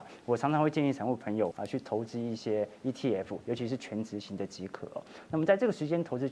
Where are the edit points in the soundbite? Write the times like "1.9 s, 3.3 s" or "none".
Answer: 1.5 s